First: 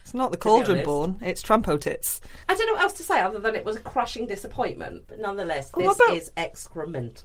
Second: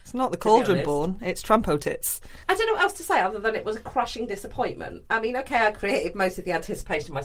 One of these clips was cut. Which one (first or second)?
first